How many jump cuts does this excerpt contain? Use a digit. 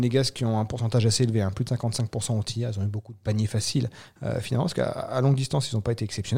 0